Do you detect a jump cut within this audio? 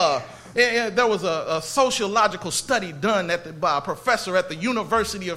no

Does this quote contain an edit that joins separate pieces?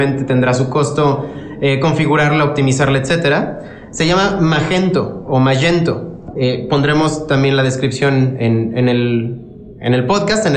yes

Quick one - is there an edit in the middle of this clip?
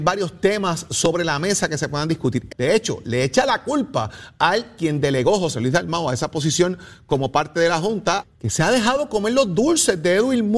yes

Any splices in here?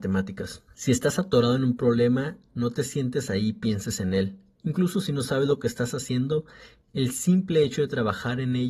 yes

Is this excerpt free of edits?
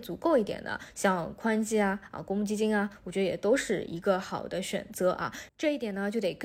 no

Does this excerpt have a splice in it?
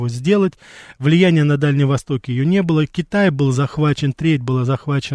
no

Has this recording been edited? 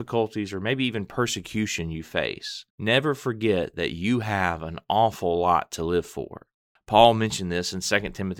yes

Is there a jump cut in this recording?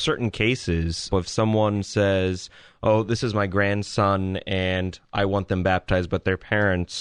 yes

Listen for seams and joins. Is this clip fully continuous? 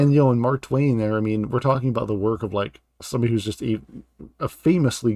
yes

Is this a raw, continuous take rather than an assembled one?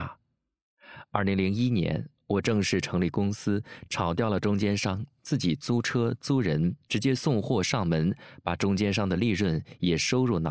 yes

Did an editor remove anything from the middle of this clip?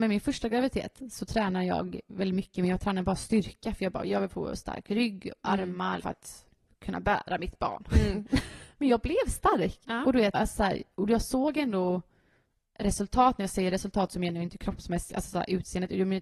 yes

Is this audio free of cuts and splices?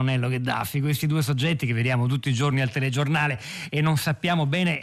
yes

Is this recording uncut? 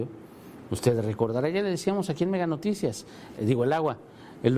no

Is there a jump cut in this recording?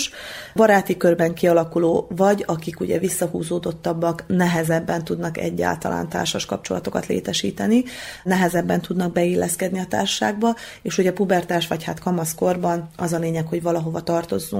no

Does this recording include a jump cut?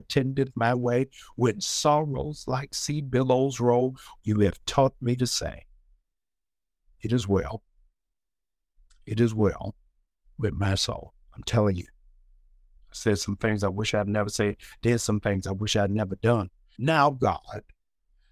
yes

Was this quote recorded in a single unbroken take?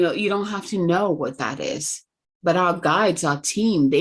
yes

